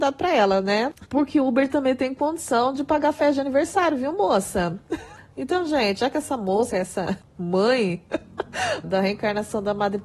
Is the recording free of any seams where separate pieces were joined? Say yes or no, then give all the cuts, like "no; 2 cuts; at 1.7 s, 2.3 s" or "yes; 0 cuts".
no; 2 cuts; at 6.7 s, 8.8 s